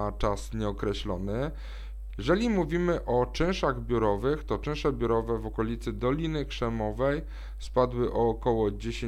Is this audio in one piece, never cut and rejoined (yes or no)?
no